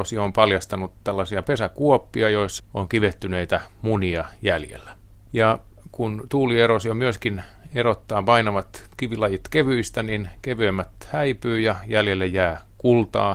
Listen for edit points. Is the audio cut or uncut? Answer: cut